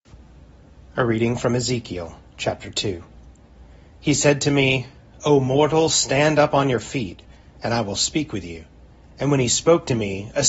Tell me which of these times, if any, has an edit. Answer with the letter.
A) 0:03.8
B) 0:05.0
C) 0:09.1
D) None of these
D